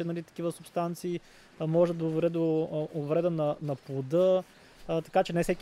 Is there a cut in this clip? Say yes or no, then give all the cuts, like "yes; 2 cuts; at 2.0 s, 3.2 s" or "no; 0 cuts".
no; 0 cuts